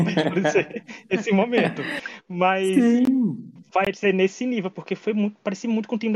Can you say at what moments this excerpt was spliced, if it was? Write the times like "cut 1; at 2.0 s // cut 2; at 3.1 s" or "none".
none